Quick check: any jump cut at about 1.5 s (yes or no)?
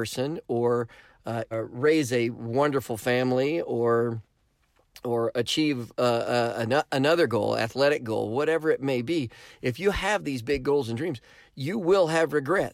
yes